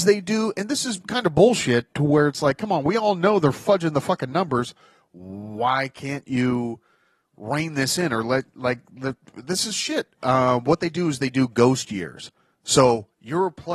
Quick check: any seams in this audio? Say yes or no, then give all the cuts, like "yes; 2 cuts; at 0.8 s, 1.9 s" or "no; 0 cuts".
no; 0 cuts